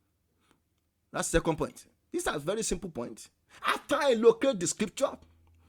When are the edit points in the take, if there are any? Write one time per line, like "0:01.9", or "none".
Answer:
0:03.6